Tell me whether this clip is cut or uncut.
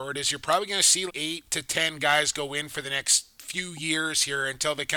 cut